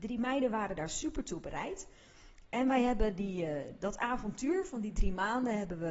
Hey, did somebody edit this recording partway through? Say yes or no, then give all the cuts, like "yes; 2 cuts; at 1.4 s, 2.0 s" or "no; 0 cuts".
no; 0 cuts